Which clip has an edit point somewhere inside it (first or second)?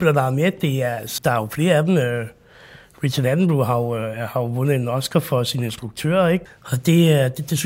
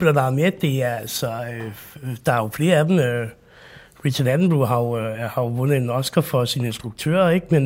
first